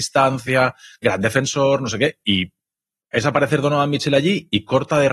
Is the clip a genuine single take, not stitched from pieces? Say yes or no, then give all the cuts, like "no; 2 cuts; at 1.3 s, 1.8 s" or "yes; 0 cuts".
yes; 0 cuts